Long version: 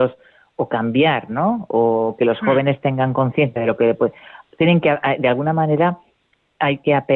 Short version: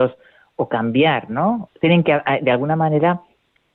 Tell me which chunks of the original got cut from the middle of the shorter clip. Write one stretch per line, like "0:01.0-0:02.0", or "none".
0:01.7-0:04.4